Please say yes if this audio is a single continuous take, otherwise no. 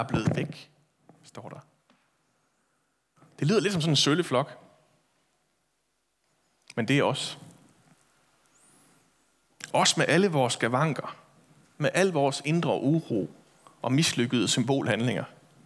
yes